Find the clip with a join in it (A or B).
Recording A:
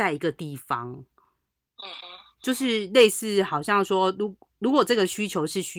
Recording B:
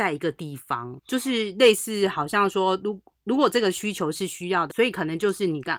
B